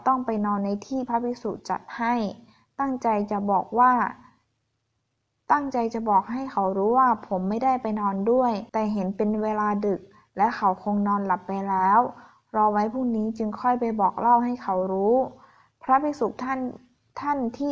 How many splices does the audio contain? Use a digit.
1